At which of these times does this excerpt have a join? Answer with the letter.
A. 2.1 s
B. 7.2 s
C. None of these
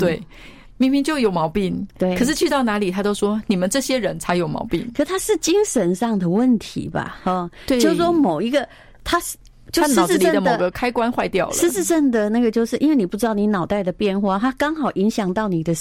C